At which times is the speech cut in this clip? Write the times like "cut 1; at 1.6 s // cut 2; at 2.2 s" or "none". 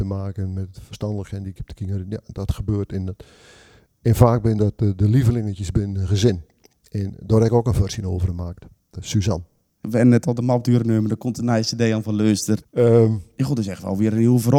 cut 1; at 12.6 s